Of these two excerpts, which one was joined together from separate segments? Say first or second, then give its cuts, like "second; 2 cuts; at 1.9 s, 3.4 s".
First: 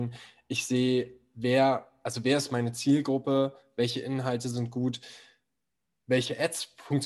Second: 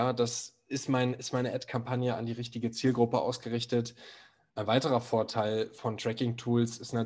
second; 1 cut; at 4.5 s